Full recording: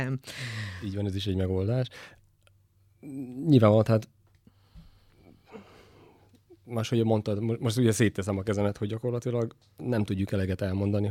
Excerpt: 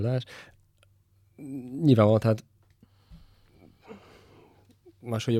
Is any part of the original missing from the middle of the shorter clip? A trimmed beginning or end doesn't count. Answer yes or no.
no